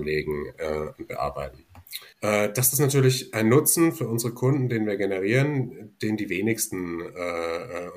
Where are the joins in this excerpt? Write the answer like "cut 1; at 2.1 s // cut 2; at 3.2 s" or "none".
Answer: cut 1; at 2.1 s